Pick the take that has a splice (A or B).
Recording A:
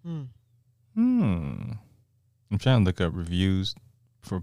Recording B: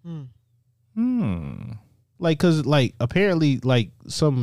B